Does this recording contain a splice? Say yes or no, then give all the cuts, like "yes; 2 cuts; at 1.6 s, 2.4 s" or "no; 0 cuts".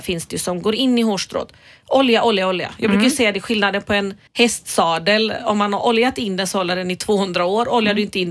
yes; 1 cut; at 4.3 s